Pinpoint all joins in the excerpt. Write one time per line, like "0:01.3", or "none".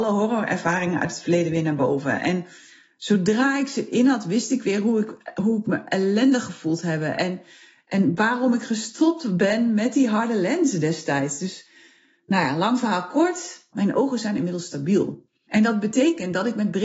0:13.7
0:15.5